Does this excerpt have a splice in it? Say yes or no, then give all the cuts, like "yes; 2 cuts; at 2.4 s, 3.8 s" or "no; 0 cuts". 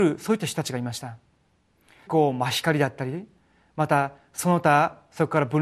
yes; 1 cut; at 2.1 s